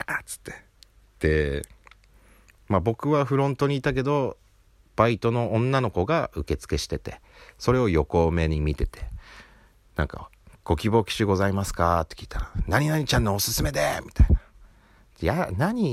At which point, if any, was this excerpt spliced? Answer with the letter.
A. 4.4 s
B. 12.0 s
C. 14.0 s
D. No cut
D